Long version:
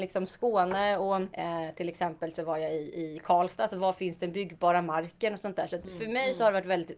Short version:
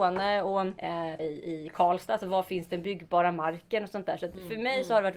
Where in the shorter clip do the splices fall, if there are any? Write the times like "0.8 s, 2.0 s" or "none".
1.2 s

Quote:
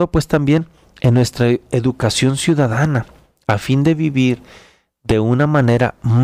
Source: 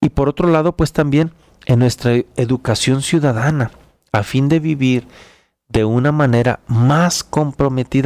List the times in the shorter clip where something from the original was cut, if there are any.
none

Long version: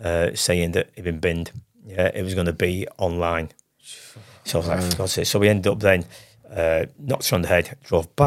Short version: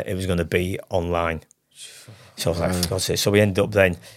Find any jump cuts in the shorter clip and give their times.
none

